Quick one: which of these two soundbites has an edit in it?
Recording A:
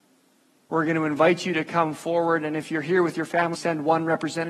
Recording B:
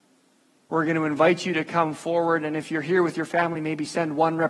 A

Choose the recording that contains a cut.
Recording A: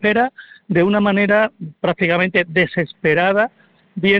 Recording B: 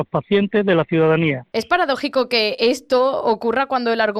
B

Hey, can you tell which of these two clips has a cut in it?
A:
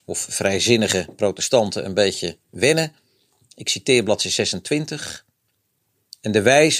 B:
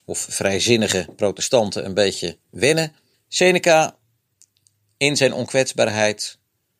B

